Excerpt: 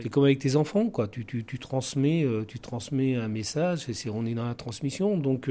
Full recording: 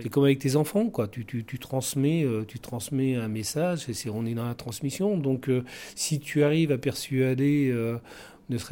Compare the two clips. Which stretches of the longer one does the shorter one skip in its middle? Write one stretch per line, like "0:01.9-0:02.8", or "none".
none